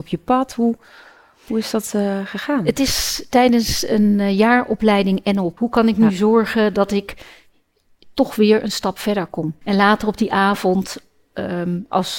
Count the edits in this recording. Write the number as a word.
two